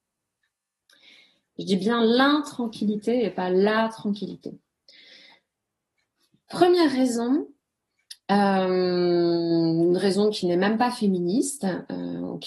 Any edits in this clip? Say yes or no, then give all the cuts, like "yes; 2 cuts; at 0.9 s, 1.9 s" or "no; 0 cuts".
yes; 1 cut; at 1.5 s